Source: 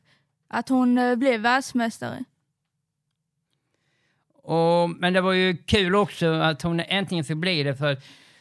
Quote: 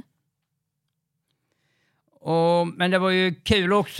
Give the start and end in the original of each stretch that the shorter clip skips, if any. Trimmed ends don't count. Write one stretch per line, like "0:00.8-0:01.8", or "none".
none